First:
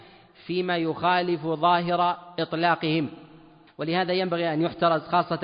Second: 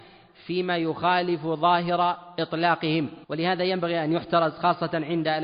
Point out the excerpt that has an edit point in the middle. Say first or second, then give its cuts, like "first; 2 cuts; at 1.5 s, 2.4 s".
second; 1 cut; at 3.2 s